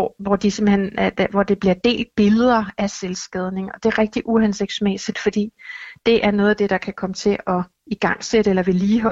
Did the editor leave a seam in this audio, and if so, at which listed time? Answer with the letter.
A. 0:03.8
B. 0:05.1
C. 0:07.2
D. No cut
D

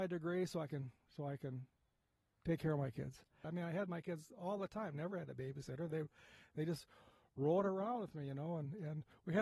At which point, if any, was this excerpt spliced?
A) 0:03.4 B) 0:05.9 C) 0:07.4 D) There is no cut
A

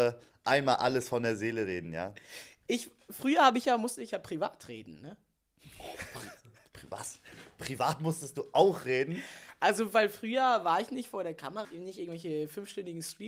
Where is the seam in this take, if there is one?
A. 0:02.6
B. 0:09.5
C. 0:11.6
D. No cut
C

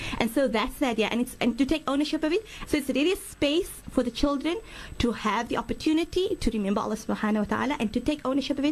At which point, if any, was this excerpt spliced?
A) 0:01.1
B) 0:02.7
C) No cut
B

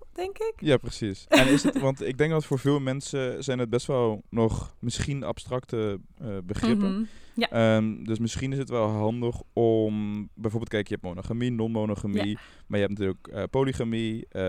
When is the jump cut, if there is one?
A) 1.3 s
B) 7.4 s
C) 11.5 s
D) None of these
D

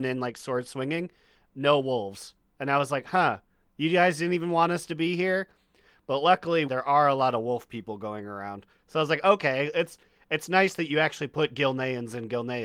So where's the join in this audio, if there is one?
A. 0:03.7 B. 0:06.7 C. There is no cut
B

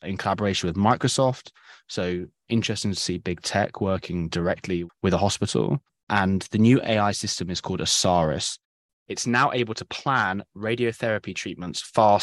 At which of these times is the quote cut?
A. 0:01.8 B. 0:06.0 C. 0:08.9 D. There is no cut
C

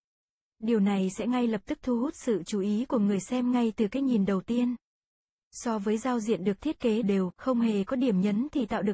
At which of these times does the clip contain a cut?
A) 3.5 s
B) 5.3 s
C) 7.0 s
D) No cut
C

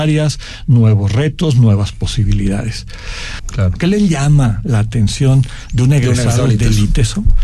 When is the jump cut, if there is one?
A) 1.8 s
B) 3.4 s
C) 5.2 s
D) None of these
B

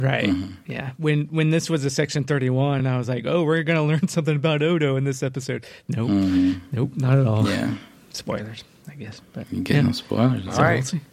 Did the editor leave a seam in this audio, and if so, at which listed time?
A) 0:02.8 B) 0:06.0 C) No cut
C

